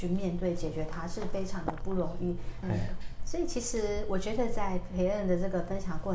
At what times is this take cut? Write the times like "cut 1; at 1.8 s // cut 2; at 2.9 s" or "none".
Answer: cut 1; at 2.6 s